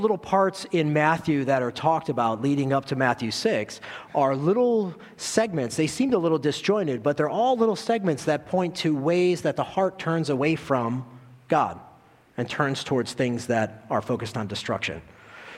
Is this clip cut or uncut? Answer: uncut